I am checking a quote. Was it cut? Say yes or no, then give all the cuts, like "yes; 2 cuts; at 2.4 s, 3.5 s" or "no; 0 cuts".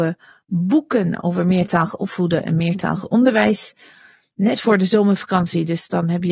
no; 0 cuts